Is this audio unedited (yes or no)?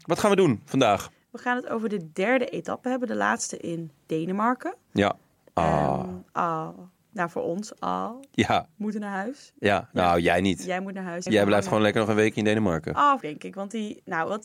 no